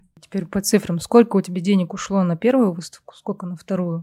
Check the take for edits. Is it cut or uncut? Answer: uncut